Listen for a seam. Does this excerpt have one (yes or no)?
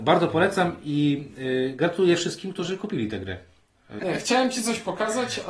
yes